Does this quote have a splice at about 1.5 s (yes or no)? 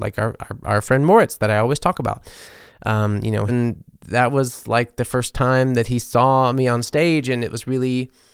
no